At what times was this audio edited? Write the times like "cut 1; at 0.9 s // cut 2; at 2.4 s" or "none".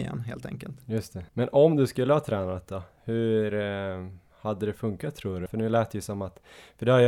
cut 1; at 1.3 s // cut 2; at 5.5 s